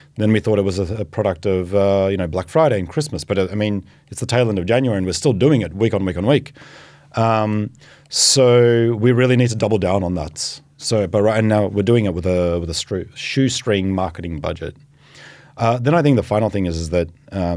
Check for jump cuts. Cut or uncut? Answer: uncut